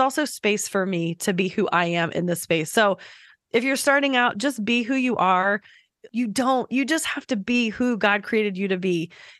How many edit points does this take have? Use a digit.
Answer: 1